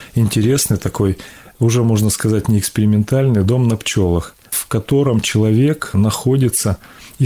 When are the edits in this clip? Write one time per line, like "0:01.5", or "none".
0:03.4